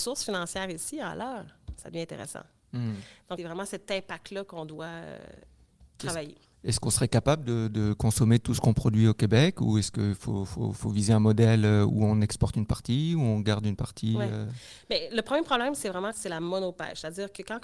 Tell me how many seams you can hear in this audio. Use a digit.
2